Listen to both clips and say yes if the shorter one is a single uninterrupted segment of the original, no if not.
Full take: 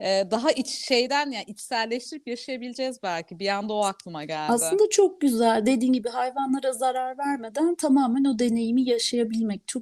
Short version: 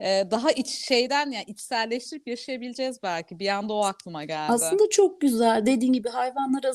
yes